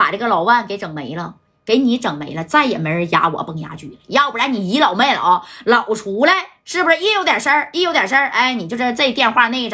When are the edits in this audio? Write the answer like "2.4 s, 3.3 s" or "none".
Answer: none